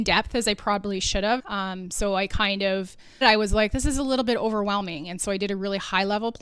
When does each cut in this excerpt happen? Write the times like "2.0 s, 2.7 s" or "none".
1.4 s, 3.2 s